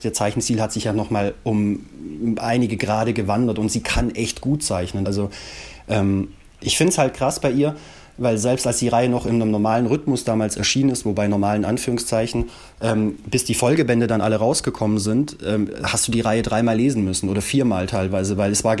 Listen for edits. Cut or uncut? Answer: cut